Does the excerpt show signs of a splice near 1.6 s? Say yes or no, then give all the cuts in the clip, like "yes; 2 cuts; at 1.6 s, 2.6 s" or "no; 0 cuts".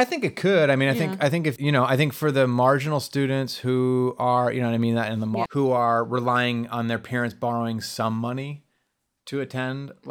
yes; 2 cuts; at 1.6 s, 5.4 s